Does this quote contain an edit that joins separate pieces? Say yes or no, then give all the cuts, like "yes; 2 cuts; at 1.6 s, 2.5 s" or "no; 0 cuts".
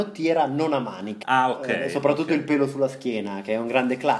yes; 1 cut; at 1.2 s